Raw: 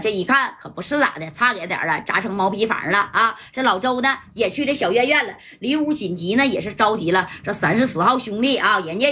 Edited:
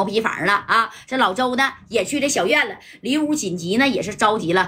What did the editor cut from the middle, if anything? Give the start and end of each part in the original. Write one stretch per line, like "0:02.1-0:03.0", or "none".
0:04.9-0:05.1